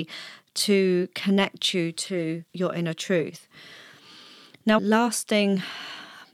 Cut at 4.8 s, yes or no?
yes